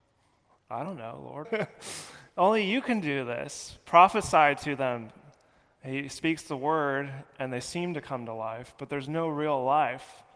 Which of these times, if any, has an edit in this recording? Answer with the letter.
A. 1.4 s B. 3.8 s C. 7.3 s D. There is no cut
A